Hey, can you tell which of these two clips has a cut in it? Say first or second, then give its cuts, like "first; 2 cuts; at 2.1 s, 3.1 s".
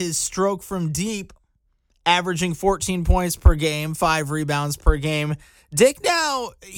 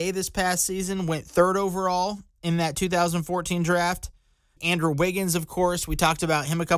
second; 1 cut; at 4.6 s